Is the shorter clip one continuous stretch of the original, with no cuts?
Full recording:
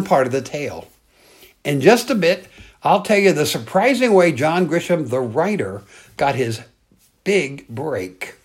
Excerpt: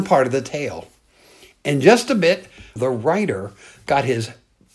no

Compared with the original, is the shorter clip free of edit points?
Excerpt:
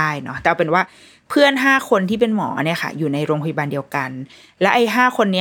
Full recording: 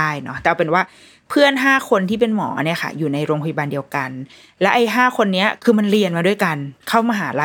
yes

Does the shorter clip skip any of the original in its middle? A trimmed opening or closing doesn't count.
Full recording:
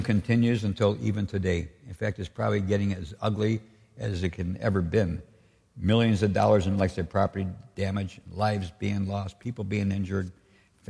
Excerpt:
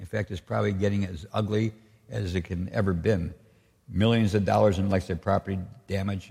no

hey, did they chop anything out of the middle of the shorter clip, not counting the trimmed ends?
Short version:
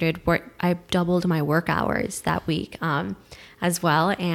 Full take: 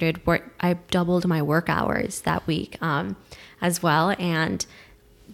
no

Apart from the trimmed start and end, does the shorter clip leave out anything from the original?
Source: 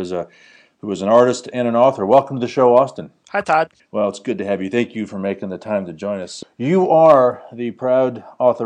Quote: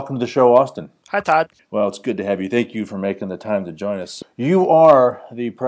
no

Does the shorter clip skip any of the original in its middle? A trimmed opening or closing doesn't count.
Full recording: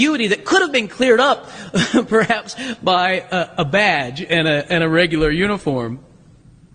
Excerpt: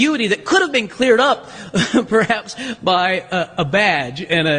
no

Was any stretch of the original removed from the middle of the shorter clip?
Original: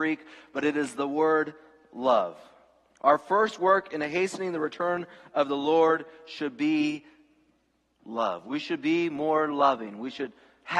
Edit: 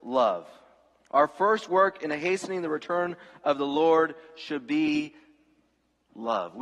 no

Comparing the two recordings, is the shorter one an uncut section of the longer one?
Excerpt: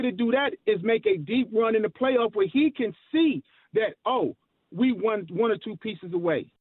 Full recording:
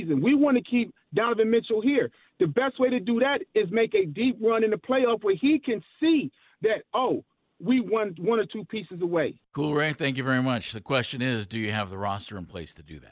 yes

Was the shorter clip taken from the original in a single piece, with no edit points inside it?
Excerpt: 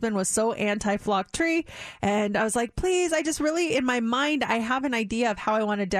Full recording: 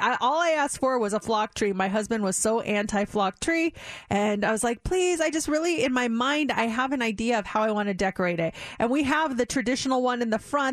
yes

